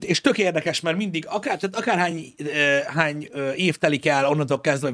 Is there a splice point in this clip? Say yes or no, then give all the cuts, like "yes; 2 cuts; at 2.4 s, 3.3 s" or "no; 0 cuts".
no; 0 cuts